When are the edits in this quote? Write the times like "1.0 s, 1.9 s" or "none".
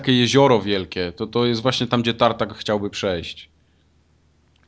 none